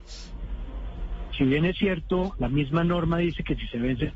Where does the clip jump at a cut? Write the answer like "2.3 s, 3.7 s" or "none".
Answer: 1.3 s, 2.3 s

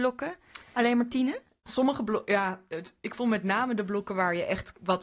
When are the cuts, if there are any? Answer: none

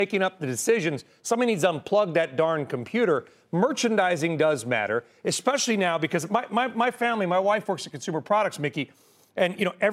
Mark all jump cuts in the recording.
none

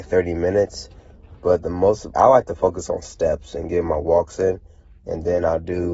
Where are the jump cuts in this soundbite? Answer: 2.1 s

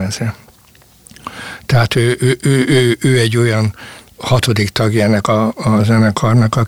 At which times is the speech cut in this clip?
none

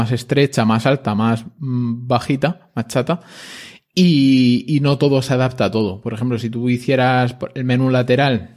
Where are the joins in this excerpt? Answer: none

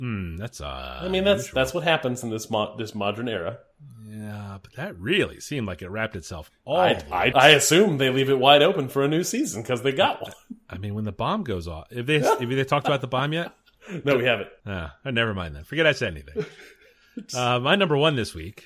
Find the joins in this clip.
7.3 s, 14.6 s

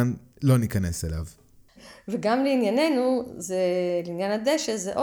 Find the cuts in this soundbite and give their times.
1.8 s

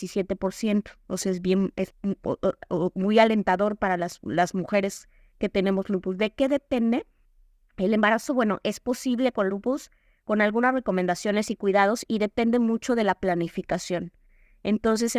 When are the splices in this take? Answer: none

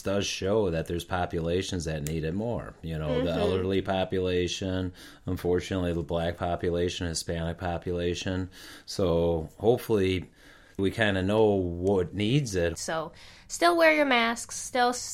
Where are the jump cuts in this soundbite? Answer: 10.8 s, 12.7 s

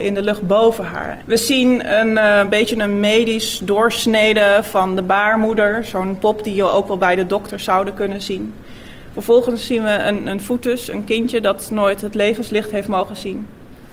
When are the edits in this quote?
1.2 s

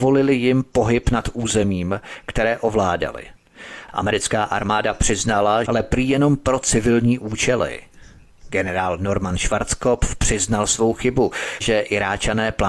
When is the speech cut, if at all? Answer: 5.6 s, 11.6 s

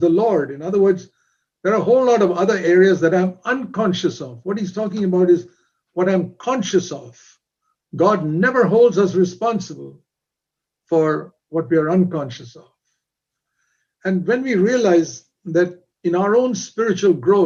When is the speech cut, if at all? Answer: none

